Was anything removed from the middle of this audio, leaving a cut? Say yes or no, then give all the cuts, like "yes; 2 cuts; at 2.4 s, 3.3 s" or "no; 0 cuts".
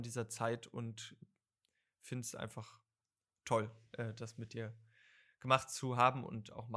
no; 0 cuts